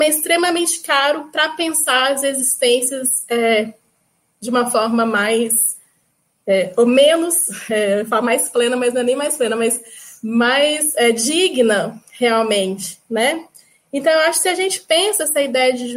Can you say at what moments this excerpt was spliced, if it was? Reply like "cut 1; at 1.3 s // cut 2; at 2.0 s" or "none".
none